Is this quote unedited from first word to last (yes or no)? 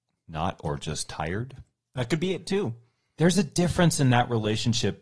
yes